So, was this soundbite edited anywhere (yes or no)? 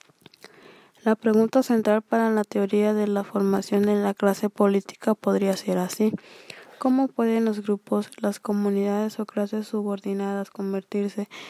no